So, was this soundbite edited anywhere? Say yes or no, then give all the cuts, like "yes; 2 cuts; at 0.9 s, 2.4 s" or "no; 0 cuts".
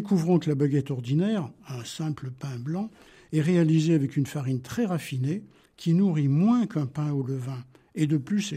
no; 0 cuts